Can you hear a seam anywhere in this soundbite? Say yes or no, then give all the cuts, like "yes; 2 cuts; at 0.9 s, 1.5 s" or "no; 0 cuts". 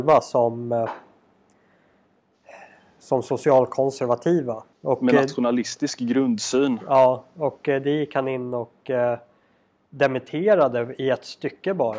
yes; 1 cut; at 4.7 s